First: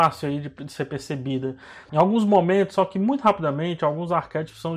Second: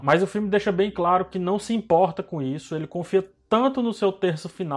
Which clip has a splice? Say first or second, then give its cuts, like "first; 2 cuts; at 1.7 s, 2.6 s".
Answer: first; 1 cut; at 1.9 s